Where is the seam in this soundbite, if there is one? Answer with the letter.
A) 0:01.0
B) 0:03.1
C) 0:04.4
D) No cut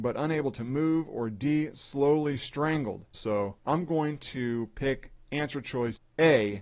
B